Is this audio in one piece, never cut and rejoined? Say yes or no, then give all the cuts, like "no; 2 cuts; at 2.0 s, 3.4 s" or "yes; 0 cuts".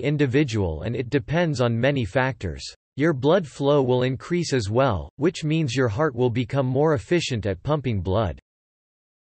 no; 1 cut; at 2.9 s